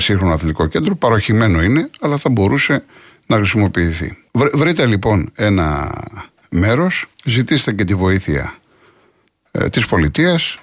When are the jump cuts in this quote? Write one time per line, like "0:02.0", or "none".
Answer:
0:04.3
0:07.1